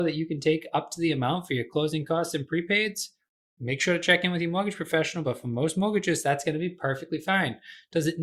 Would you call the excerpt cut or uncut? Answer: uncut